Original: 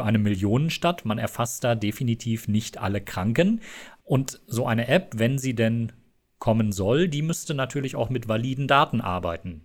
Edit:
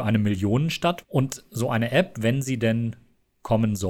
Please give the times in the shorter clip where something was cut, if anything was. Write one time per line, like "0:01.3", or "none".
0:01.0